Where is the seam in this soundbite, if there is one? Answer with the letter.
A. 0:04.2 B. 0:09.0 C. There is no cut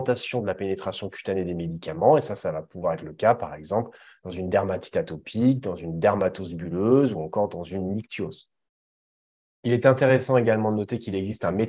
C